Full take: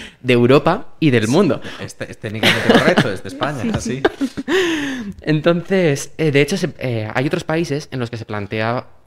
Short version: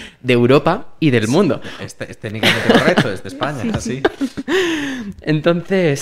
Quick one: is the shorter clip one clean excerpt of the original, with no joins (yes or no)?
yes